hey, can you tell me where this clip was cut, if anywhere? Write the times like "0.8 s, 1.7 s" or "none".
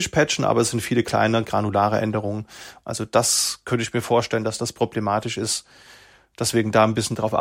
2.8 s

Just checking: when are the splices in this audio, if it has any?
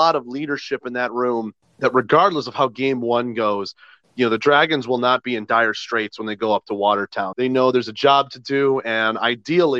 7.3 s

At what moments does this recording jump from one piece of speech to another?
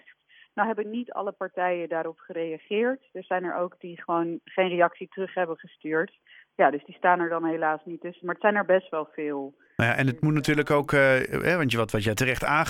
none

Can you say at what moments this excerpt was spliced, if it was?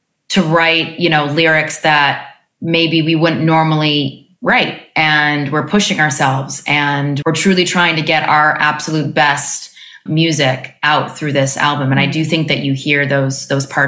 4.4 s, 7.2 s, 10.1 s

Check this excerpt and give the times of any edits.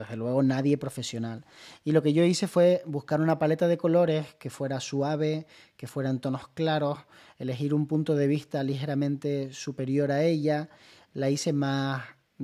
none

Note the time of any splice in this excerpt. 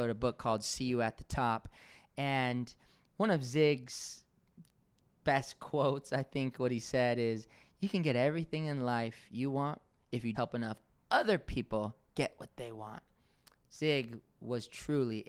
10.3 s

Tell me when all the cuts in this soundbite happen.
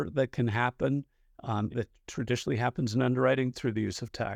1.7 s

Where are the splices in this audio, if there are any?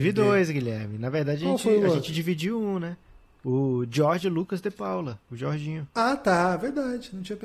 5.9 s

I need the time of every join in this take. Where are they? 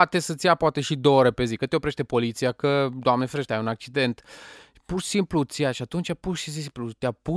none

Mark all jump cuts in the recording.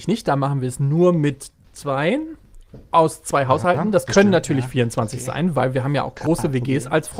none

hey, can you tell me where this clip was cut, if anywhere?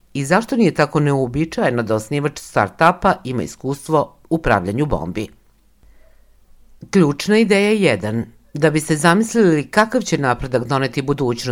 none

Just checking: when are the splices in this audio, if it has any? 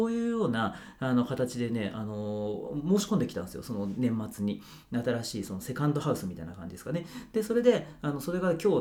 none

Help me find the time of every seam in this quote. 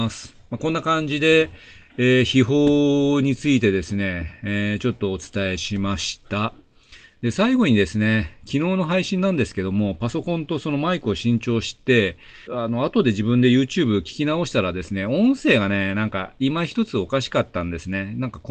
12.5 s

